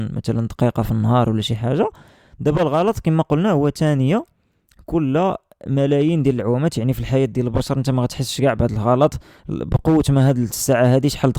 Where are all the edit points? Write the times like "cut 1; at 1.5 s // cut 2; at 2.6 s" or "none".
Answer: none